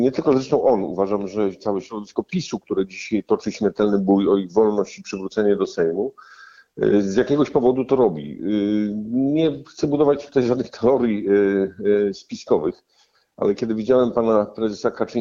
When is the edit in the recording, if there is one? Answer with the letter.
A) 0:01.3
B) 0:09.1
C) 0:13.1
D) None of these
D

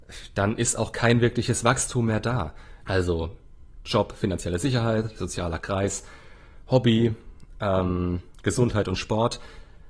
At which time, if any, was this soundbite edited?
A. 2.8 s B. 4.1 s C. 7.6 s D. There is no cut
A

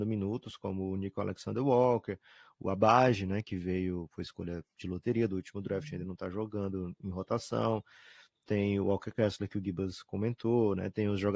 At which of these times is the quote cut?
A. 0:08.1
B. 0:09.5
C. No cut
C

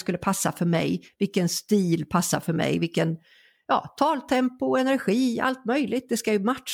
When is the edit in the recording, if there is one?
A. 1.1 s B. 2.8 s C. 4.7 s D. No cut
D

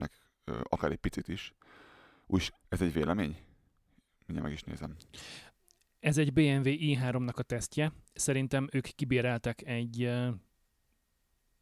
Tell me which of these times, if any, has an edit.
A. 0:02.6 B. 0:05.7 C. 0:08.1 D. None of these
A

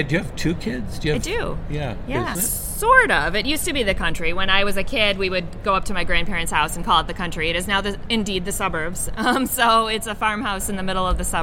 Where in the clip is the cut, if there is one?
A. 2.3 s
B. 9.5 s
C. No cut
A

